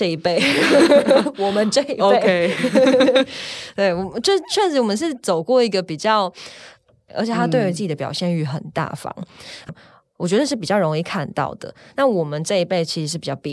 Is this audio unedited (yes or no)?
no